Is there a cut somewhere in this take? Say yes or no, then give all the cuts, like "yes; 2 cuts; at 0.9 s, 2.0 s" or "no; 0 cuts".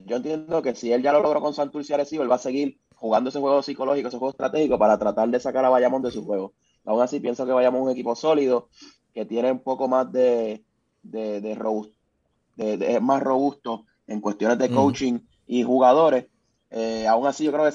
no; 0 cuts